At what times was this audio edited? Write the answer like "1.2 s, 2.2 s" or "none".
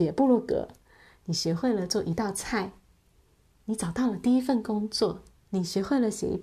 5.4 s